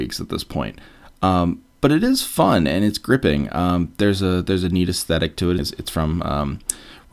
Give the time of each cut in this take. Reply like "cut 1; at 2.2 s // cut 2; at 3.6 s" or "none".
cut 1; at 5.6 s